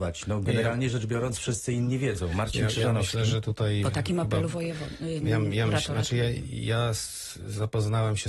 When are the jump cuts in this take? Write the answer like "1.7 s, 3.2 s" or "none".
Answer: none